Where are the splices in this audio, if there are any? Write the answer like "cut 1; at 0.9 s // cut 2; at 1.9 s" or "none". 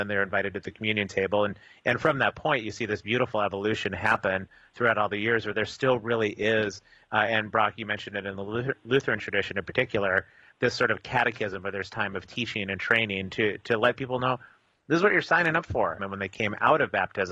cut 1; at 16.0 s